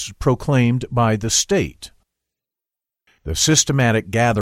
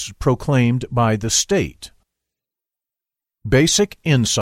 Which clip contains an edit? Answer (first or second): first